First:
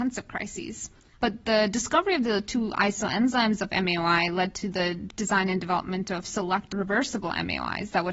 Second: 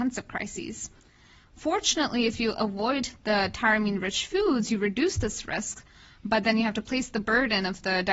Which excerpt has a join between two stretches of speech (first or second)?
first